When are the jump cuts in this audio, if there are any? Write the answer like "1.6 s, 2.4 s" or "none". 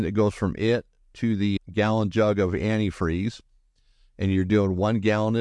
1.6 s